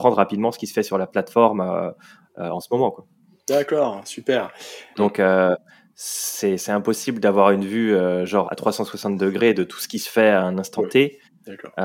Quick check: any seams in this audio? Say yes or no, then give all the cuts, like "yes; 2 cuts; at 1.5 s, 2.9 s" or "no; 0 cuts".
yes; 2 cuts; at 4.9 s, 8.4 s